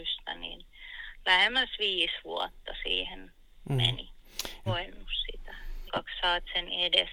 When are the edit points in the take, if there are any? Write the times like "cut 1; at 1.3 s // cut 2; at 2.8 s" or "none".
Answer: cut 1; at 4.7 s // cut 2; at 5.9 s